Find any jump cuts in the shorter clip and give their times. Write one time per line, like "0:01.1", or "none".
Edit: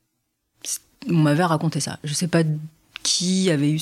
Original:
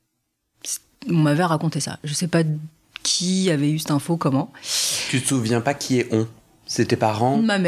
none